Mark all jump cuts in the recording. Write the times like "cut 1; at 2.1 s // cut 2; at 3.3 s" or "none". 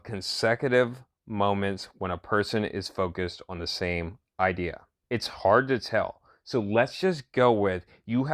cut 1; at 5.0 s